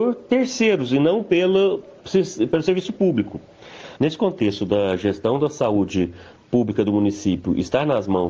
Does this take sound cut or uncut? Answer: cut